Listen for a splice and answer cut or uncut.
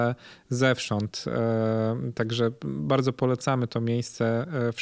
uncut